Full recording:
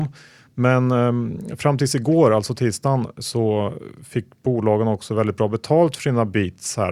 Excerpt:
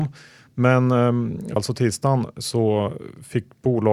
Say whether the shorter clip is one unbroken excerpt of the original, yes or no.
no